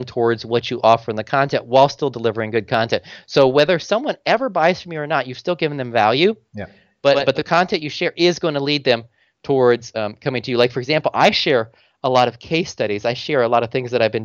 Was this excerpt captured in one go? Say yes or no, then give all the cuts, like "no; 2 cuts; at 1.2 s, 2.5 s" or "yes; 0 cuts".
yes; 0 cuts